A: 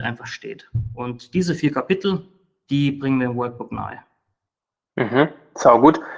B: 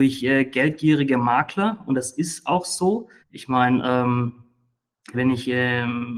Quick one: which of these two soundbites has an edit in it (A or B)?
B